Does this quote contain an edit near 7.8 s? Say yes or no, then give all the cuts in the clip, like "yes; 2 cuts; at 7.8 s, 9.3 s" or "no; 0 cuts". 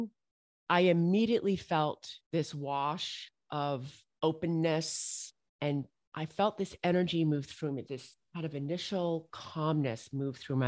yes; 1 cut; at 7.8 s